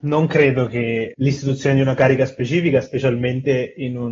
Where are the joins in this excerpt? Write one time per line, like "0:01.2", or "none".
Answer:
0:01.1